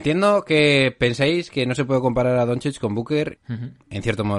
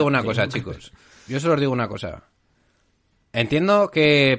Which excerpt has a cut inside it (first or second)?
first